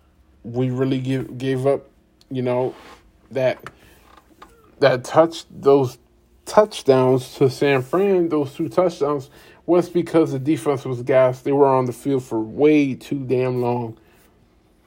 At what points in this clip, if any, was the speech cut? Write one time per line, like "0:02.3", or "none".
none